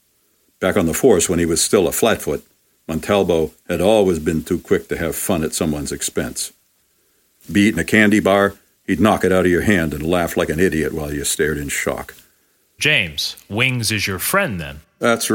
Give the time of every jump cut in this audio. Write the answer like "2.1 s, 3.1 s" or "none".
7.4 s, 12.8 s